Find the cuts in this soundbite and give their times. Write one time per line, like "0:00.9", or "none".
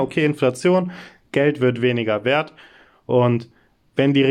none